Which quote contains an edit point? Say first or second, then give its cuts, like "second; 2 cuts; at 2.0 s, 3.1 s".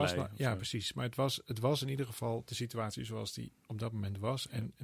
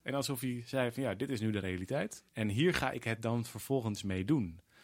second; 1 cut; at 2.3 s